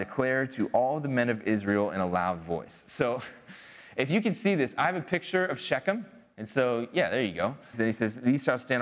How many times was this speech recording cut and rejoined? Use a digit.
2